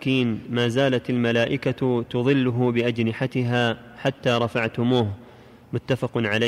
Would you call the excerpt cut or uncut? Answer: uncut